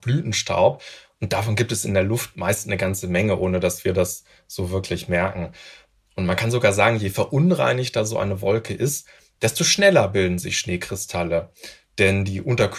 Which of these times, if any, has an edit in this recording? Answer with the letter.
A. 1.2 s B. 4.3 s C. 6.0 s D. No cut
D